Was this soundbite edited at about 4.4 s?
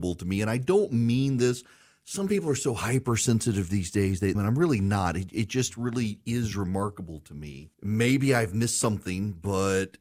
yes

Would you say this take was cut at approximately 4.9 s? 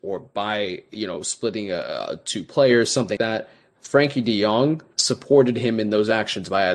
yes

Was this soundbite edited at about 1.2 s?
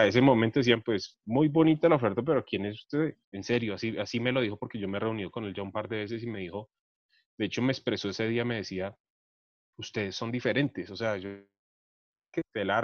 no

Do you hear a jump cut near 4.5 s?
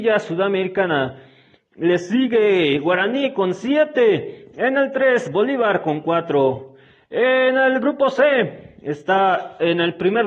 no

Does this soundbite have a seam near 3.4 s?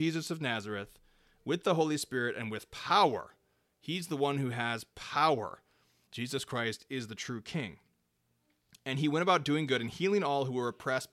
no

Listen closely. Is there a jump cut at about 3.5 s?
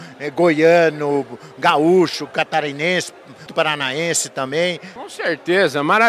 yes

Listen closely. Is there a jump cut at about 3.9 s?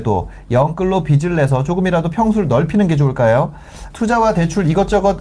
yes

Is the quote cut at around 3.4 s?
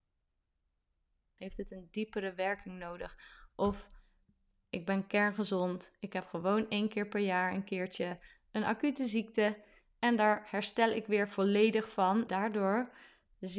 no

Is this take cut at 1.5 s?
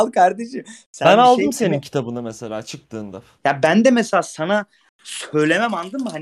no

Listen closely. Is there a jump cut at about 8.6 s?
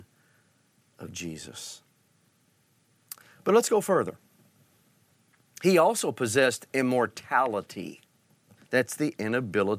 yes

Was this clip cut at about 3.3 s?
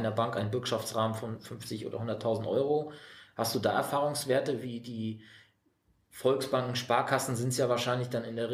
no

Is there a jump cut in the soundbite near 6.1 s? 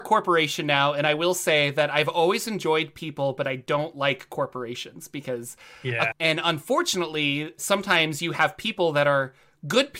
yes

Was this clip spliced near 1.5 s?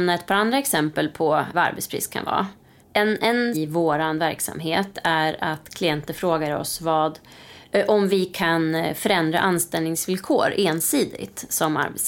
yes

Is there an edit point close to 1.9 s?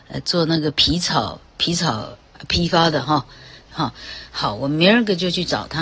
no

